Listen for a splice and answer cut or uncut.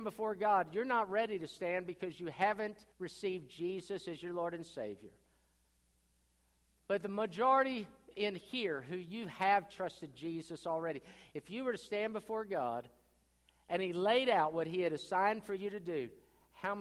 cut